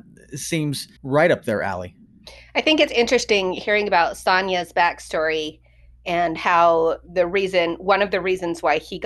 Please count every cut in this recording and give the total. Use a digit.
1